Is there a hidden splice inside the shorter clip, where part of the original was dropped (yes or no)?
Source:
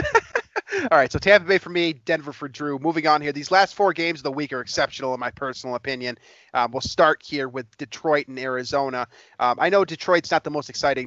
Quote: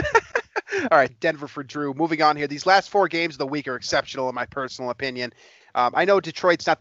yes